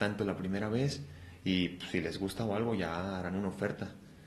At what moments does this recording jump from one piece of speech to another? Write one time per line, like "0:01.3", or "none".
none